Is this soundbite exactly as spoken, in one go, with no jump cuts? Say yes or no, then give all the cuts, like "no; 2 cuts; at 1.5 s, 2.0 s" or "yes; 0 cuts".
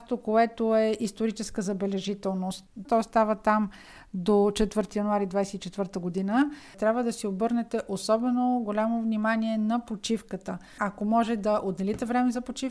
no; 3 cuts; at 2.9 s, 6.7 s, 10.8 s